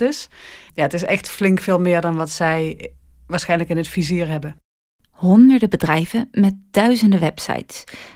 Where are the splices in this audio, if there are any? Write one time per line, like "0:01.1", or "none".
none